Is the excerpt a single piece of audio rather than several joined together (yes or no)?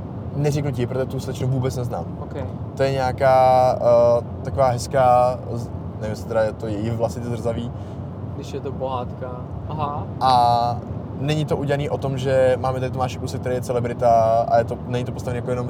no